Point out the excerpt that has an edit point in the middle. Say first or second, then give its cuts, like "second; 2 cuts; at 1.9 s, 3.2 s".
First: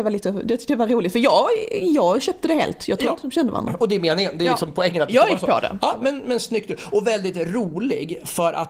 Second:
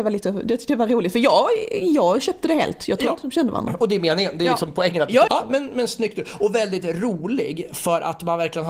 second; 1 cut; at 5.3 s